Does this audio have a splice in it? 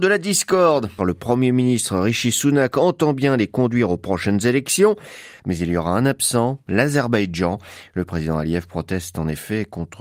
yes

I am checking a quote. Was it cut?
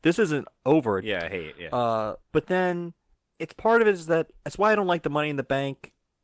yes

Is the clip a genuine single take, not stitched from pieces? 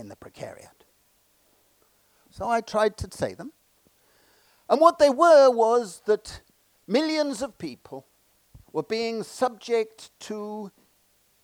no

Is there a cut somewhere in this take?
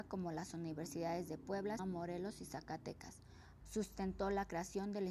yes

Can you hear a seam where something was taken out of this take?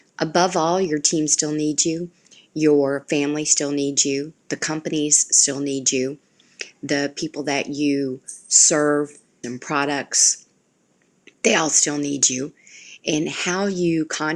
yes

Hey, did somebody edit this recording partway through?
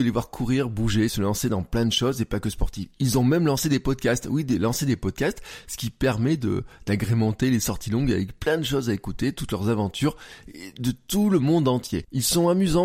yes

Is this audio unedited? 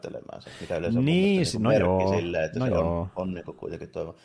yes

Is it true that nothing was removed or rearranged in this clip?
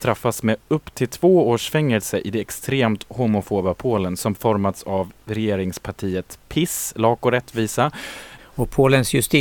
no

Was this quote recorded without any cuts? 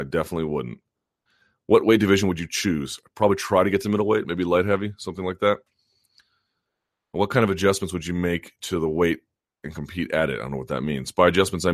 yes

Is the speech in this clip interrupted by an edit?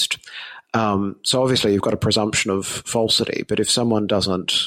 no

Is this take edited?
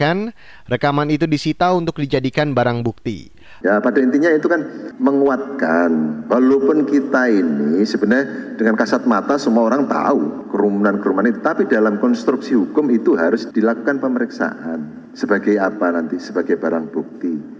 yes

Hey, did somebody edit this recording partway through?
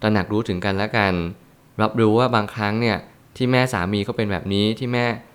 no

